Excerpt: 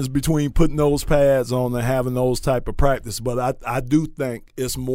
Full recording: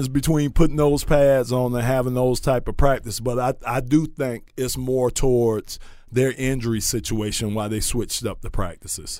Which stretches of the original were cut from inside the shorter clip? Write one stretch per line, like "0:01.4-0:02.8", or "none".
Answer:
none